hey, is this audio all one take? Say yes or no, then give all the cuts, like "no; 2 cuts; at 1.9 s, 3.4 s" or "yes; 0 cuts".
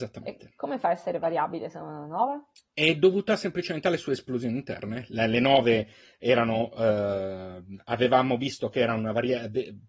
yes; 0 cuts